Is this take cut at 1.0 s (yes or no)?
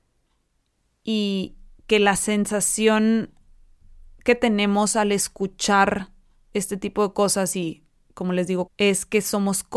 no